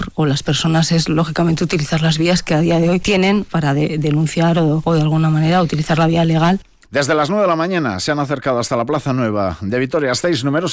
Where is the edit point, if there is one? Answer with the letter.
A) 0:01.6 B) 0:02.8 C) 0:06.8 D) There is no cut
C